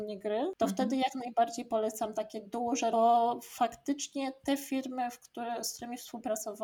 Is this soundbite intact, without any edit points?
no; 1 cut; at 2.9 s

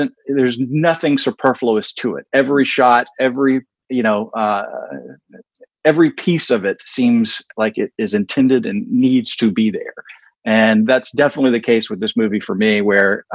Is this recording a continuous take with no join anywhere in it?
yes; 0 cuts

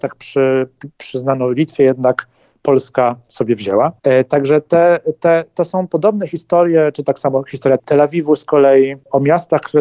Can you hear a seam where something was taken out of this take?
no; 0 cuts

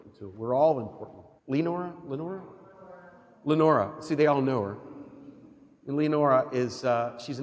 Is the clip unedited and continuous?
no; 1 cut; at 1.4 s

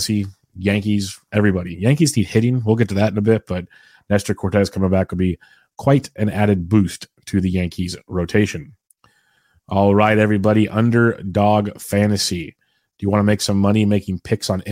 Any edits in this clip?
no; 0 cuts

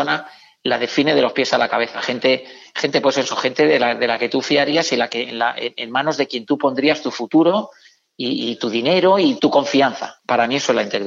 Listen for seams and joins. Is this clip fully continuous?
no; 1 cut; at 9.4 s

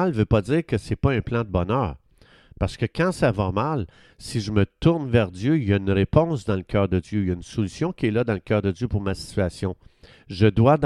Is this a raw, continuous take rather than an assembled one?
yes; 0 cuts

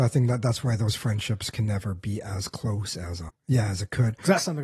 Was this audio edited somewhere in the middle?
yes; 1 cut; at 3.3 s

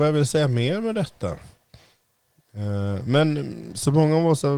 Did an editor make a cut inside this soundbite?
no; 0 cuts

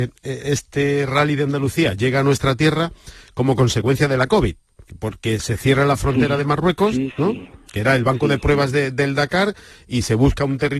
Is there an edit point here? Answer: no; 0 cuts

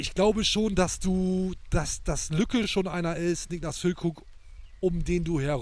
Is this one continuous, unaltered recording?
yes; 0 cuts

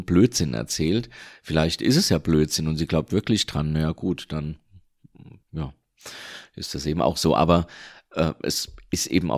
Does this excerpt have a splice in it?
yes; 1 cut; at 5.4 s

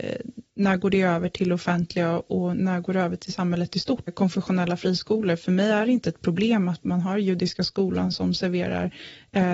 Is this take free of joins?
no; 1 cut; at 4.1 s

